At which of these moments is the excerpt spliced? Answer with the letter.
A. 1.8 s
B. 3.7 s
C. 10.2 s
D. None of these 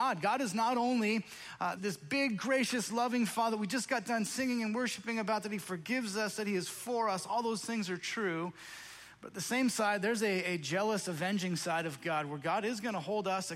A